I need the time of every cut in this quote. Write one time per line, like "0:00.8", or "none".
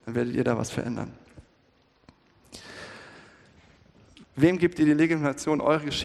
0:04.2